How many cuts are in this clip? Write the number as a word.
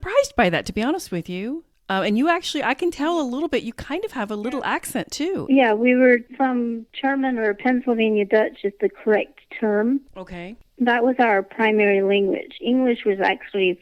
one